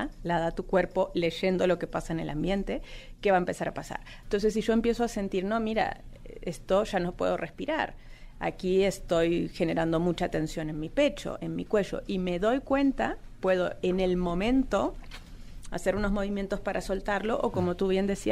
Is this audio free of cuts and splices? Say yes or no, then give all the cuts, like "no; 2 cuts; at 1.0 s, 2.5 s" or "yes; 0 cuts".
no; 1 cut; at 4.2 s